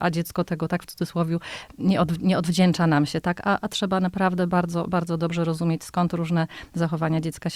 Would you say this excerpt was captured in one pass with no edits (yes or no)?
yes